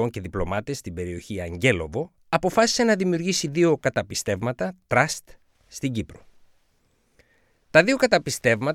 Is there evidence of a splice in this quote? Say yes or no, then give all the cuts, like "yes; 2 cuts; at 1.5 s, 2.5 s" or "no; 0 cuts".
yes; 1 cut; at 2.2 s